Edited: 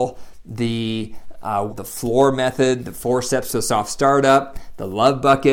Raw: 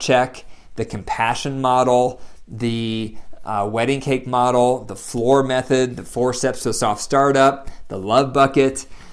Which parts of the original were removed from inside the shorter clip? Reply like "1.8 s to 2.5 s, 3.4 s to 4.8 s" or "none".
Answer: 3.7 s to 4.8 s